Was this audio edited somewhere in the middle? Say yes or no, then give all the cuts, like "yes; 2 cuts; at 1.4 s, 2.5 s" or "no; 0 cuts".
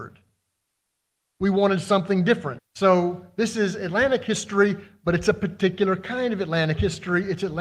yes; 1 cut; at 2.6 s